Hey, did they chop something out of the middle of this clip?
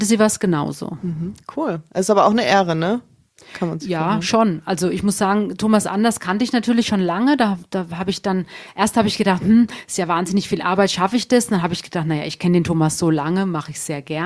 no; 0 cuts

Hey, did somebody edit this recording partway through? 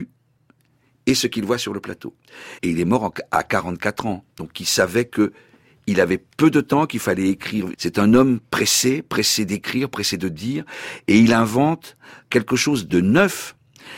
yes; 2 cuts; at 2.6 s, 7.7 s

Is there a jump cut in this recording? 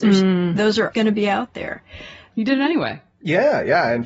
yes; 2 cuts; at 0.9 s, 2.3 s

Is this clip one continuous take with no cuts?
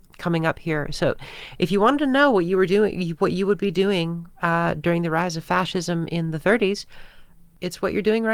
yes; 0 cuts

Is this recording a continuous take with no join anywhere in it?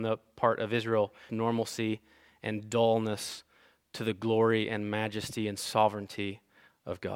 no; 1 cut; at 1.3 s

